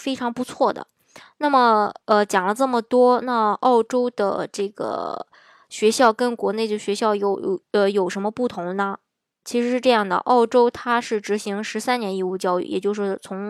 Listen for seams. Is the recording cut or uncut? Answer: uncut